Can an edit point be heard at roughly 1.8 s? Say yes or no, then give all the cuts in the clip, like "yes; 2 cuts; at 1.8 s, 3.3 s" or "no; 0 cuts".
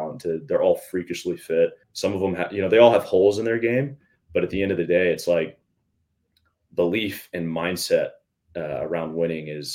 yes; 1 cut; at 1.8 s